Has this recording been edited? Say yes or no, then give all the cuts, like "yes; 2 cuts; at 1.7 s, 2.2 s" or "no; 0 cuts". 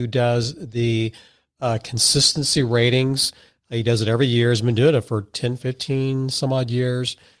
no; 0 cuts